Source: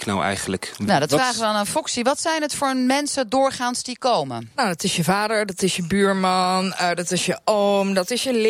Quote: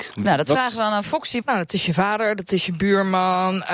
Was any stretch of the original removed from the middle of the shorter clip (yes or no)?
yes